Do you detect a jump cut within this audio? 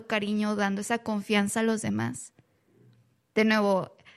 no; 0 cuts

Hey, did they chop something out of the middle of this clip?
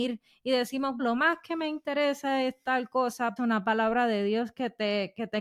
yes; 2 cuts; at 1.0 s, 3.4 s

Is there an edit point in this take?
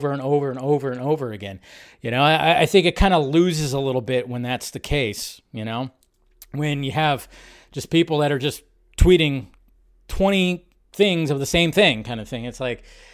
no; 0 cuts

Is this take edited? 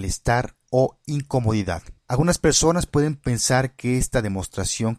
yes; 1 cut; at 2.0 s

